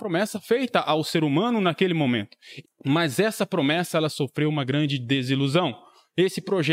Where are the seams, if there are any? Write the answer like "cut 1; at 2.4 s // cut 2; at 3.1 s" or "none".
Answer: cut 1; at 2.6 s